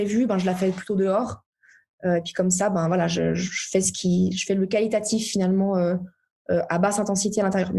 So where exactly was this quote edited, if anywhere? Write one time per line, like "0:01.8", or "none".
none

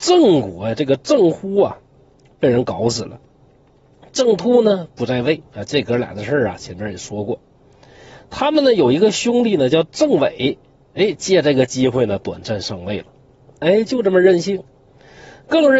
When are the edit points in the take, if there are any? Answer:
0:05.5
0:13.6

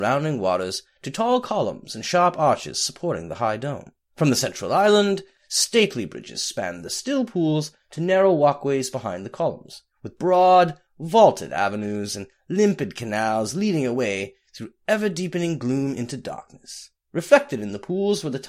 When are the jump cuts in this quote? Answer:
none

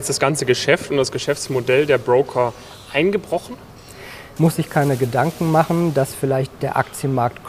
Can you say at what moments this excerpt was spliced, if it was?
0:04.4

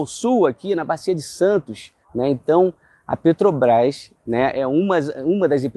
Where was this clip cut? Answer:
0:02.0
0:04.1

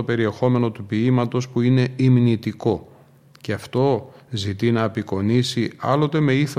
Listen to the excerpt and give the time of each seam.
none

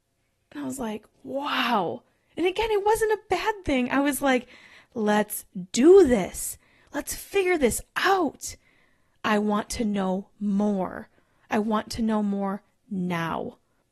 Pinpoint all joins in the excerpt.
none

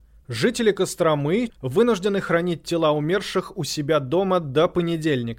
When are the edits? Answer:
0:01.5

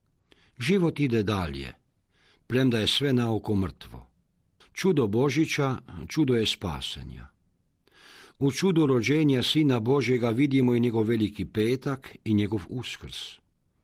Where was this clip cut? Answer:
0:04.6

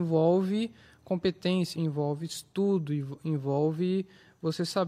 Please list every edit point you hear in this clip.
0:01.7

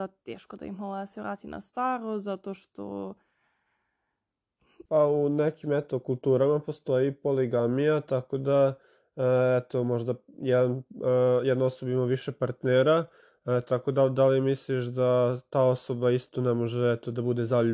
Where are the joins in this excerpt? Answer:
0:04.9

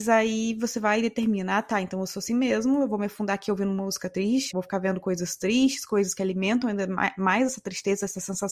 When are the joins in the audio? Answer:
0:04.5

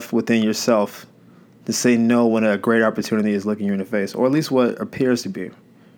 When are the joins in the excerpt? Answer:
none

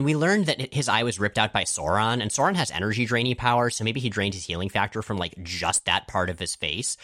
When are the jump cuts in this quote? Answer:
none

